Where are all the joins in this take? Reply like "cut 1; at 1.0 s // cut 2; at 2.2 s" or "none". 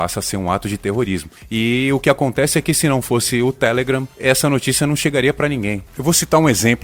cut 1; at 5.9 s